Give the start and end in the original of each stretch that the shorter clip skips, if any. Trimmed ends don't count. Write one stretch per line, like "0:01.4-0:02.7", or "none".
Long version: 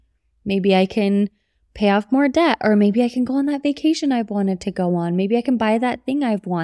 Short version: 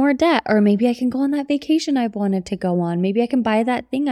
none